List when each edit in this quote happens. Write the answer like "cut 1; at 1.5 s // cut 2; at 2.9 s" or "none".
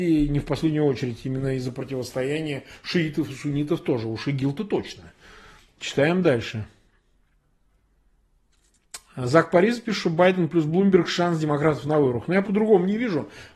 cut 1; at 12.4 s